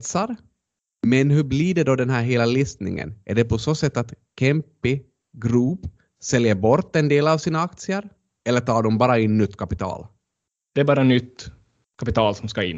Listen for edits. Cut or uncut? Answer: uncut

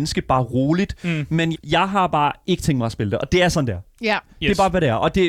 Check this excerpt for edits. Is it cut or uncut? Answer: cut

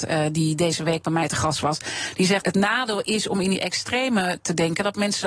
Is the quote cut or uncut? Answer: cut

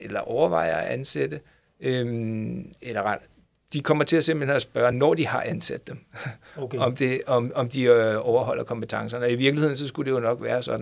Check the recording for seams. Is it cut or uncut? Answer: uncut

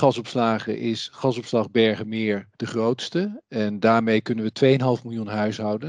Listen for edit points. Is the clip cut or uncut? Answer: cut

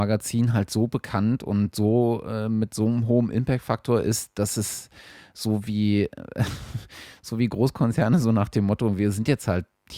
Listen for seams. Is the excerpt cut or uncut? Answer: uncut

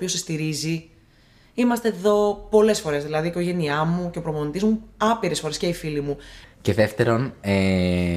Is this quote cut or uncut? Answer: cut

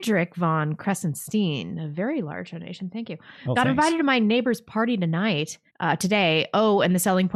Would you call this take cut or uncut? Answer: cut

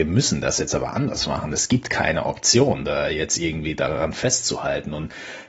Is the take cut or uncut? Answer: uncut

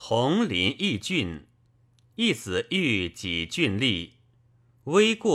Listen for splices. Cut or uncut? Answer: uncut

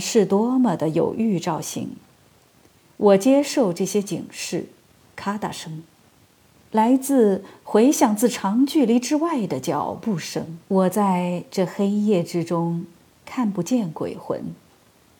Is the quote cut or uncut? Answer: cut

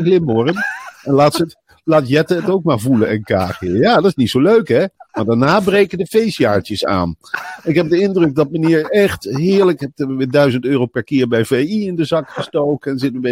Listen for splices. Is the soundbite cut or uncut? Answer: cut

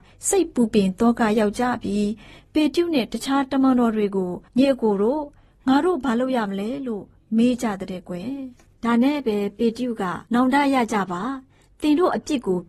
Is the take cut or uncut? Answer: cut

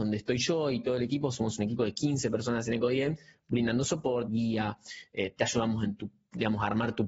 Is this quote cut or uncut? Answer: cut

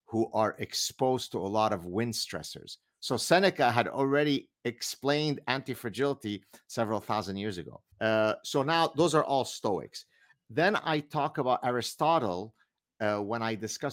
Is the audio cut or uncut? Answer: cut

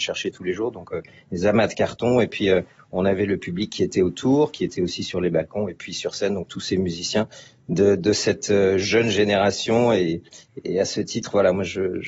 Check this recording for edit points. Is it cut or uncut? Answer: uncut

